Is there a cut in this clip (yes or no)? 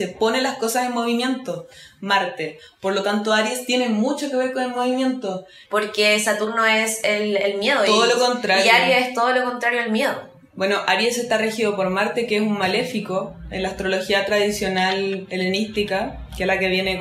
yes